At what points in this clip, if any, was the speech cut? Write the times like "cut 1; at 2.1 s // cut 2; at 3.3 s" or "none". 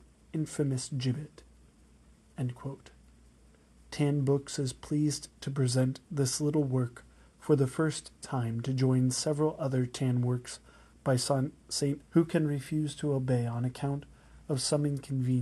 cut 1; at 12.0 s